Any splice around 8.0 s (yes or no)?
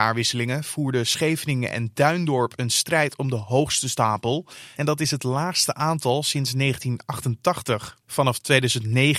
no